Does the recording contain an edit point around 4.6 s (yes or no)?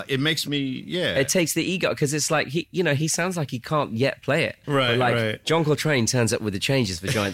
yes